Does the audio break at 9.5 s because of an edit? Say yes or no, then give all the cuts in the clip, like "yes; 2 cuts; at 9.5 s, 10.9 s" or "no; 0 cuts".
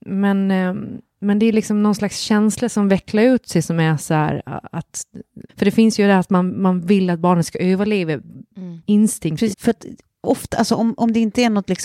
yes; 2 cuts; at 5.5 s, 9.5 s